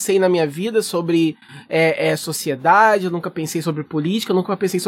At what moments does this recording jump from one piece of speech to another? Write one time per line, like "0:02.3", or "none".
none